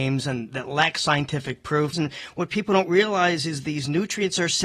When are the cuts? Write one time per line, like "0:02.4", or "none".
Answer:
0:01.9